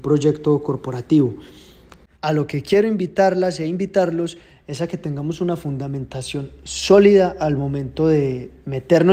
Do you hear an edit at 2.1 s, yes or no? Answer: yes